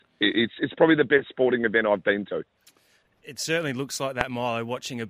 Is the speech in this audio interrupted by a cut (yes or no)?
yes